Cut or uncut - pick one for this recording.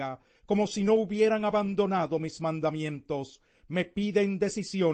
uncut